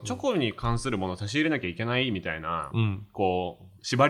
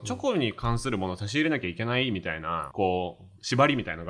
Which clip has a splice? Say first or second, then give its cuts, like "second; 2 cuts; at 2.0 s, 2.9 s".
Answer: second; 1 cut; at 2.7 s